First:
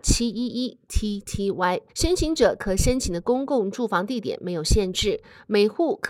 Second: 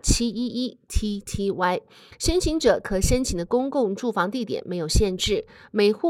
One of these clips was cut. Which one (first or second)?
first